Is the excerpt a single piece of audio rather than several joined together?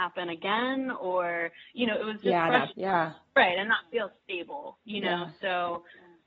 no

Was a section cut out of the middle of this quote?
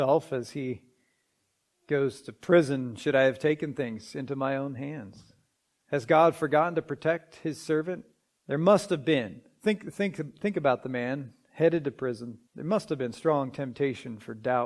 yes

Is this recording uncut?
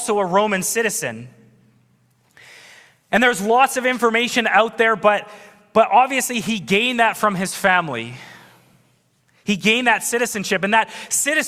yes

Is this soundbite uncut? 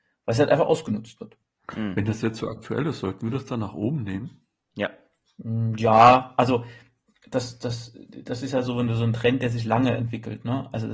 yes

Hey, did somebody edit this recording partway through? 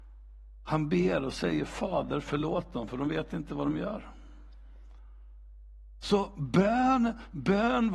no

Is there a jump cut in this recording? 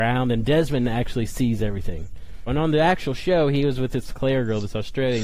yes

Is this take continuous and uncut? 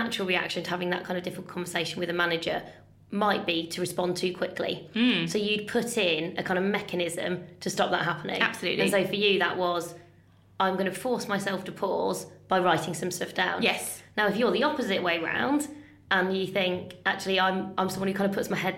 yes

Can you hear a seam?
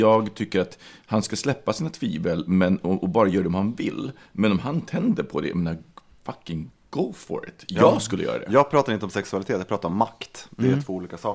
no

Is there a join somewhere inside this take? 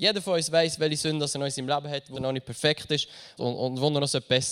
yes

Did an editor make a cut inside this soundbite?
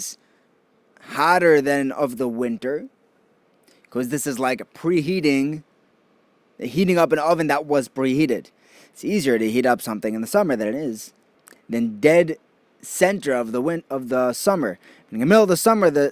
no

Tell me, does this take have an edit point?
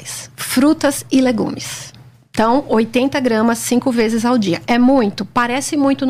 no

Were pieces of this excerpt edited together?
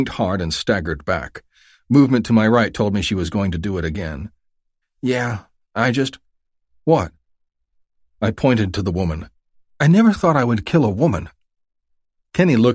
yes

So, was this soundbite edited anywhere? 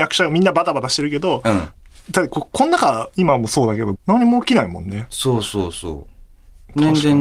yes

